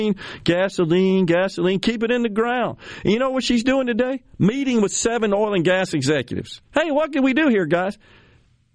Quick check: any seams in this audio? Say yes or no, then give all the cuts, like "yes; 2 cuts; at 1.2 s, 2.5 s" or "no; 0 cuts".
no; 0 cuts